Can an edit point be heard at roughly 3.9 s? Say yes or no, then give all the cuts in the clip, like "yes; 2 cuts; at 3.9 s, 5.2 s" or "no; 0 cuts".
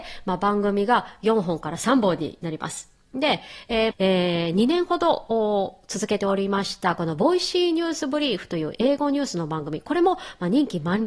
yes; 1 cut; at 3.9 s